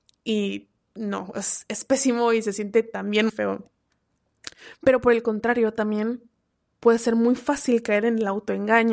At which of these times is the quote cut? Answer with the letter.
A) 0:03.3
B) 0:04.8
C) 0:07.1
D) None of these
A